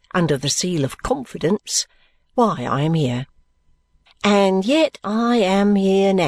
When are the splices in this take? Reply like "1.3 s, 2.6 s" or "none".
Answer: 4.1 s